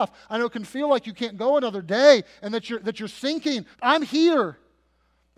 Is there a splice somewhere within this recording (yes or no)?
yes